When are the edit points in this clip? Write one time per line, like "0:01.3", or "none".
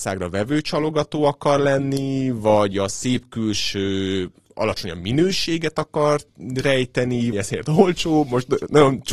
0:07.3